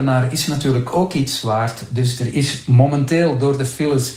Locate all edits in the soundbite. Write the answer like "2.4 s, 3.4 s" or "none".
none